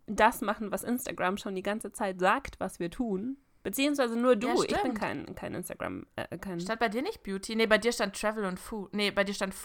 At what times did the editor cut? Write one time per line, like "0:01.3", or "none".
none